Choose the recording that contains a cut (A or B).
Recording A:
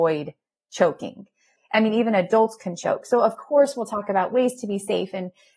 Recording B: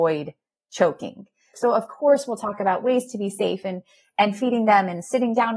B